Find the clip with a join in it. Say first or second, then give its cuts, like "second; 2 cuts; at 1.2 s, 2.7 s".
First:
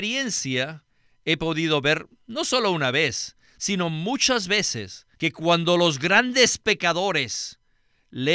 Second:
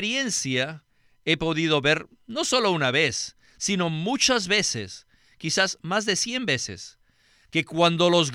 first; 1 cut; at 5.2 s